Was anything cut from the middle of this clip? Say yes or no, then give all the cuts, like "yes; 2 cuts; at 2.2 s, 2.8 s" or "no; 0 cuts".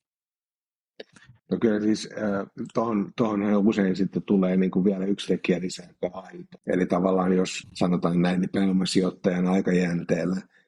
yes; 2 cuts; at 6.6 s, 7.6 s